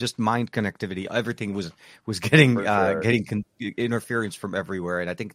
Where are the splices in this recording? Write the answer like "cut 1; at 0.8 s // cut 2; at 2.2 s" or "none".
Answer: none